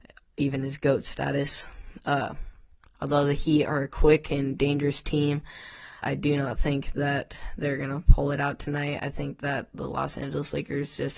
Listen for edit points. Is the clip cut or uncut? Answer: cut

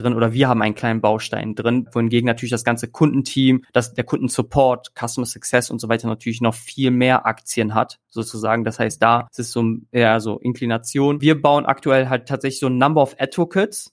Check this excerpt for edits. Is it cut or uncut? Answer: uncut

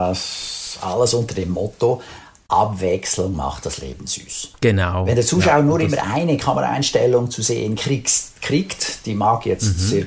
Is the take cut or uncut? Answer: cut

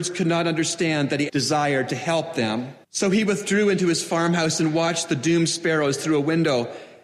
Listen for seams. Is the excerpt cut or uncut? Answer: cut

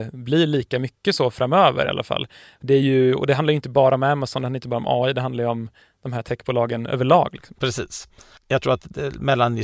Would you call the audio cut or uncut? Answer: cut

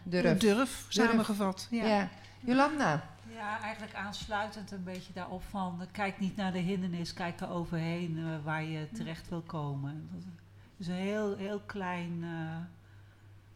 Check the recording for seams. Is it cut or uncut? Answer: uncut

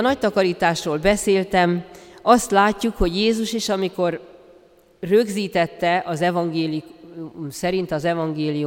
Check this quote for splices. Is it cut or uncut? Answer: uncut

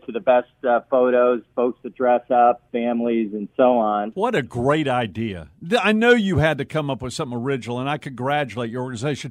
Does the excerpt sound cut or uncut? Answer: uncut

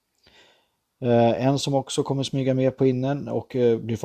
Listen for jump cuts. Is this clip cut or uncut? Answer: uncut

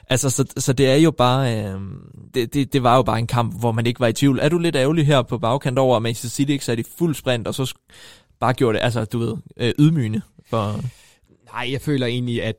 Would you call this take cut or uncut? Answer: cut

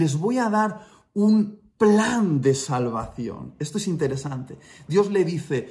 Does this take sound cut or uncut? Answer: uncut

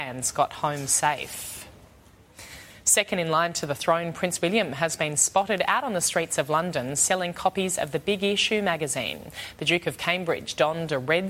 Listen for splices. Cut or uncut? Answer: uncut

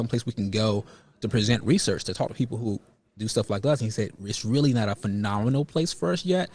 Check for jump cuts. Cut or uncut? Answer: uncut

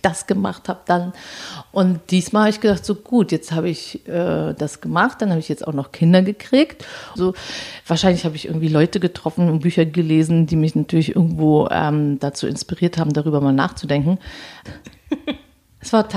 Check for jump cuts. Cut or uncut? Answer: cut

